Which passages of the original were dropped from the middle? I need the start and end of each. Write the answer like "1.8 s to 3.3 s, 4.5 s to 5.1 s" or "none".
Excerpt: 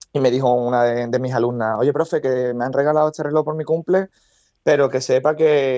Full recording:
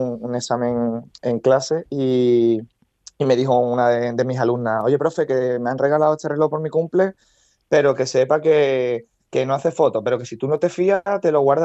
none

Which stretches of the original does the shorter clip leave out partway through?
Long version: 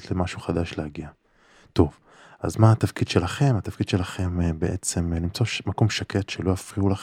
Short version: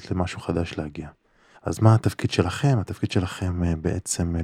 1.5 s to 2.3 s

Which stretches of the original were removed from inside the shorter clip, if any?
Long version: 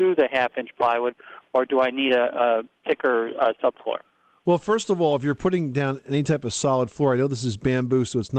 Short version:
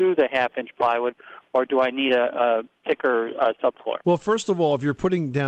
4.0 s to 4.4 s

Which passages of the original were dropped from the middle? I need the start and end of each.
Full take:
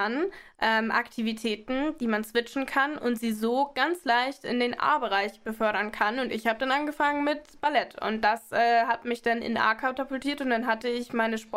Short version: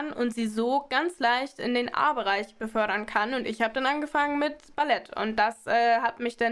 none

